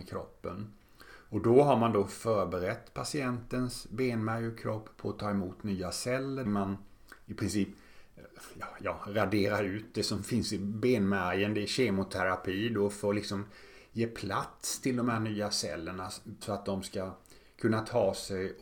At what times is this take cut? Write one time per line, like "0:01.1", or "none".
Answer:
0:06.4
0:16.4